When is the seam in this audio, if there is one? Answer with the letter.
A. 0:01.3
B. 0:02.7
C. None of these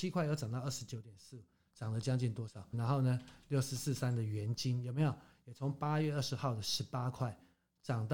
B